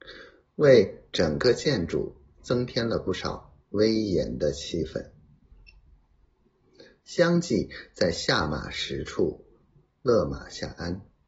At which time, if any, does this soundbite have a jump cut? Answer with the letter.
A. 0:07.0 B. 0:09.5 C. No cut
A